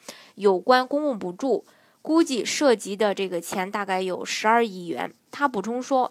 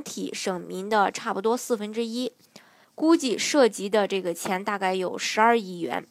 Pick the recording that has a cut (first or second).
second